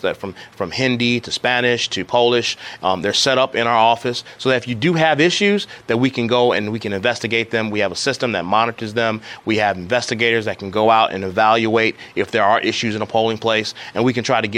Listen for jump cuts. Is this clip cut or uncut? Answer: uncut